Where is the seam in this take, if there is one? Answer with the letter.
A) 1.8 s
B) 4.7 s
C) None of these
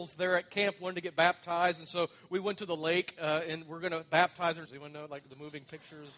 B